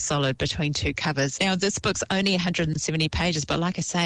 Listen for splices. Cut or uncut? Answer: cut